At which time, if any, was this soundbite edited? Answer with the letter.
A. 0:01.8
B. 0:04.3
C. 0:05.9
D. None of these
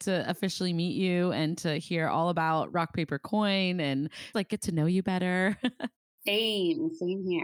B